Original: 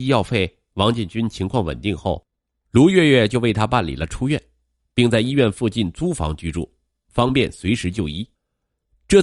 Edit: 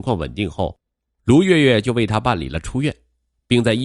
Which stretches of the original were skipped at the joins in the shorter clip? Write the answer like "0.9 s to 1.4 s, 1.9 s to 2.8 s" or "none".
none